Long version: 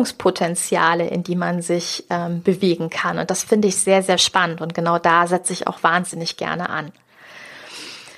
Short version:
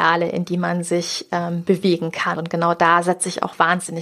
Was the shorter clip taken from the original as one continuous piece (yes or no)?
no